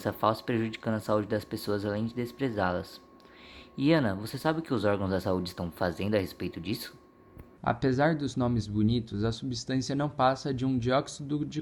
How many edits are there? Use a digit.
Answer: 1